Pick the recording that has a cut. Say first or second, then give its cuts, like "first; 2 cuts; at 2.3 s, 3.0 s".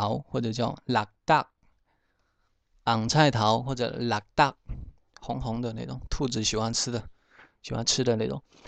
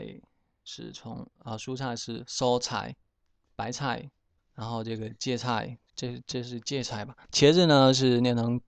second; 3 cuts; at 4.4 s, 5.9 s, 7.3 s